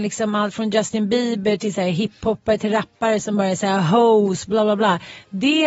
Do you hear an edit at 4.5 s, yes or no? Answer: no